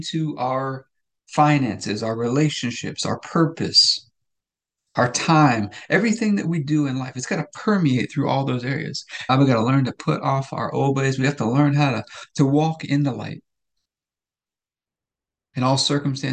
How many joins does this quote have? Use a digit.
1